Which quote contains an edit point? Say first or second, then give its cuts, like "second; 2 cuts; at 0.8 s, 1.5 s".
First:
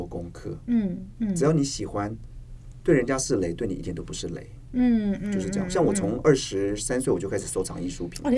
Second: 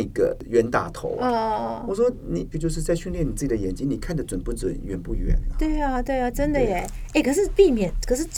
second; 1 cut; at 2.5 s